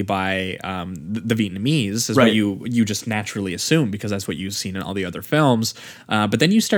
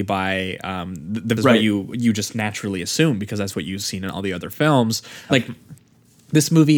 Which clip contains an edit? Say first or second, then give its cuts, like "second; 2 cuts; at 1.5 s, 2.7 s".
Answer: second; 2 cuts; at 1.4 s, 5.3 s